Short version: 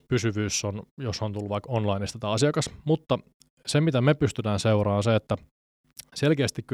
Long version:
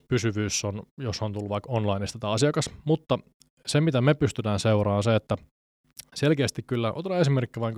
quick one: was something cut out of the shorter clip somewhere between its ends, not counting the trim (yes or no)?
no